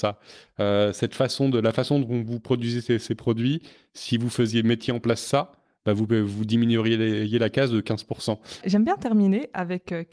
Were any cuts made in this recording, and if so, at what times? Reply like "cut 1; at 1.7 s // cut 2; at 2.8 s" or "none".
cut 1; at 8.6 s